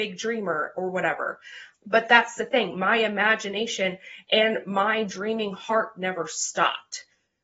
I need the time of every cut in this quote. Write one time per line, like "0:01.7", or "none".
0:01.7